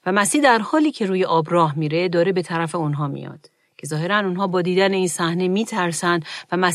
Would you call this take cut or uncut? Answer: uncut